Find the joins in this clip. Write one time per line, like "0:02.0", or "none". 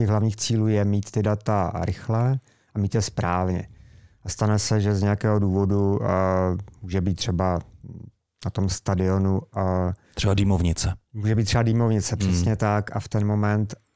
none